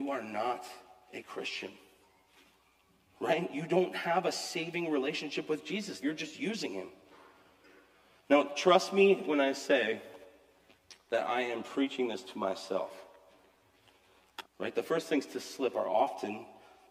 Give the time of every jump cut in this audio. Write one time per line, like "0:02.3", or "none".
0:06.0
0:14.4